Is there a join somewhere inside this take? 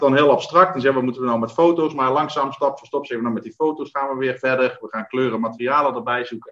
no; 0 cuts

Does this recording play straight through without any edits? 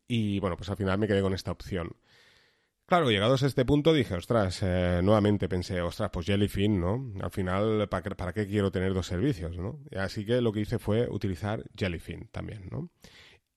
yes; 0 cuts

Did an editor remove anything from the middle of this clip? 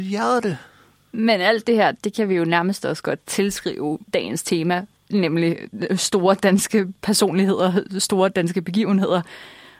no; 0 cuts

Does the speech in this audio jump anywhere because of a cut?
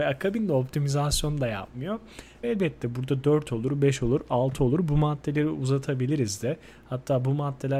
yes; 1 cut; at 2.4 s

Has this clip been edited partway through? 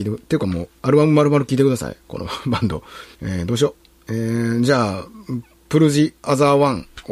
yes; 1 cut; at 3.1 s

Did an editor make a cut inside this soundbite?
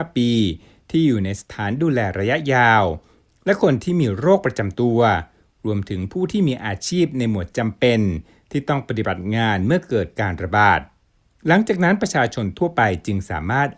no; 0 cuts

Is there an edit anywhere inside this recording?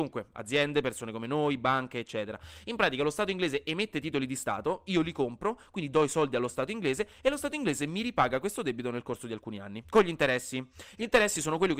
no; 0 cuts

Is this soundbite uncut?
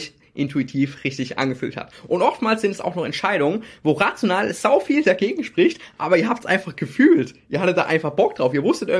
yes; 0 cuts

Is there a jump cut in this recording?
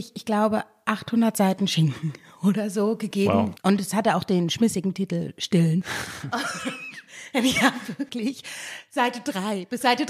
yes; 1 cut; at 3.6 s

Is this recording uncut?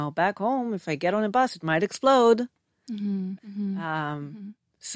no; 1 cut; at 3.4 s

